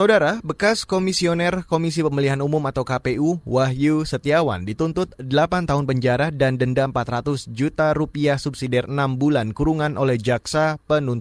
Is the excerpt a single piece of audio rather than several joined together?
yes; 0 cuts

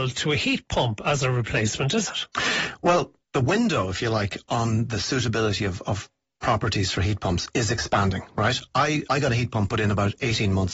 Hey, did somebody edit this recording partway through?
yes; 2 cuts; at 3.2 s, 9.0 s

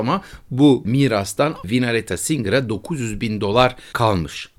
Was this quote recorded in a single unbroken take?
yes; 0 cuts

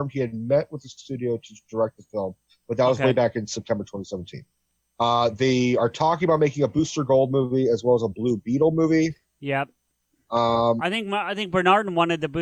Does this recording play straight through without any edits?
yes; 0 cuts

